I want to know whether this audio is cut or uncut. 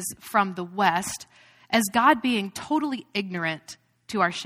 uncut